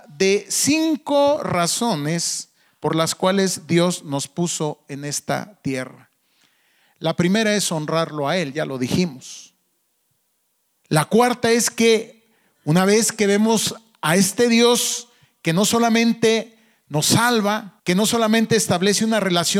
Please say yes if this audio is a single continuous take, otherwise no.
no